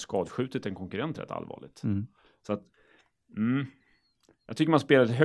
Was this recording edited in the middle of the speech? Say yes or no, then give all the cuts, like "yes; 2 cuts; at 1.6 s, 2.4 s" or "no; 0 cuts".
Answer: no; 0 cuts